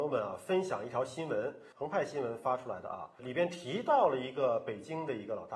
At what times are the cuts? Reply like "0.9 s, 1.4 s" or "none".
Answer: 1.7 s